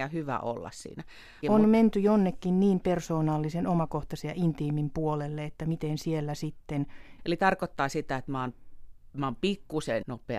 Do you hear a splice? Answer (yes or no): yes